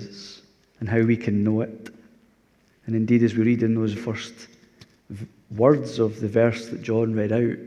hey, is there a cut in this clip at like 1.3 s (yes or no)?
no